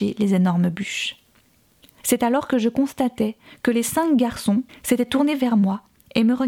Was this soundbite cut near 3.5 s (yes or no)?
no